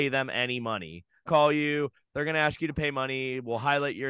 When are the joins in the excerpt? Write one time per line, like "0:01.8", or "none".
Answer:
0:01.3